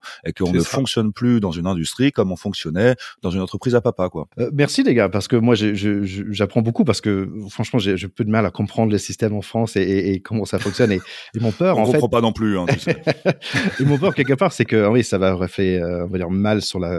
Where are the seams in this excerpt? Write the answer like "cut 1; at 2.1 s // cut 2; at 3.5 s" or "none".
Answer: cut 1; at 4.3 s